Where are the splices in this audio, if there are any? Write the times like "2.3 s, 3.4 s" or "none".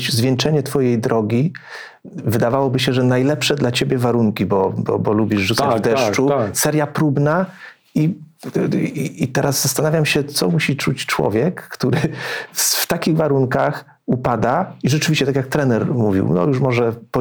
none